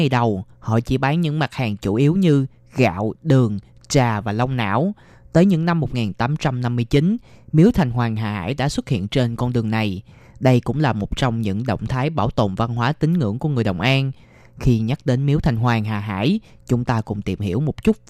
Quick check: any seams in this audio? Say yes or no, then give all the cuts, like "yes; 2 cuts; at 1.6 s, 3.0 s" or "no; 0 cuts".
no; 0 cuts